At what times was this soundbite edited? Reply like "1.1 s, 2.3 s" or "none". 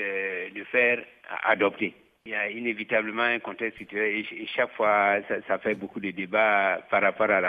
2.2 s